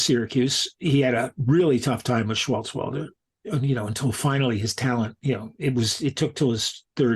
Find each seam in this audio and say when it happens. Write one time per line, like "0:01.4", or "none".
none